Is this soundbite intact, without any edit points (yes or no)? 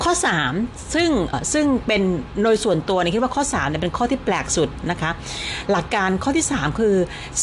no